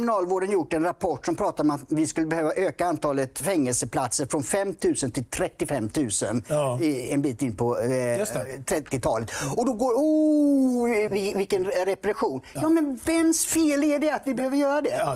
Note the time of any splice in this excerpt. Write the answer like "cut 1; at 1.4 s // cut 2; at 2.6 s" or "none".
cut 1; at 11.1 s